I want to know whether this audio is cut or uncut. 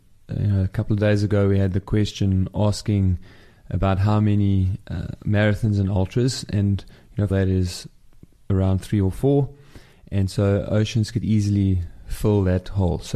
cut